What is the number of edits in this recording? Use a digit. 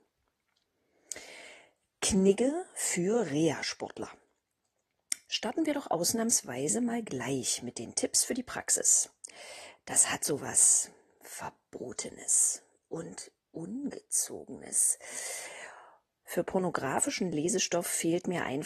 1